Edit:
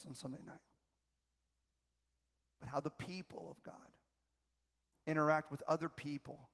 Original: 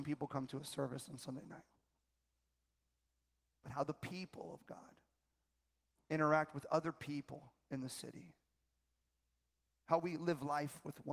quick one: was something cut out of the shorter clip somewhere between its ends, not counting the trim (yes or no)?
no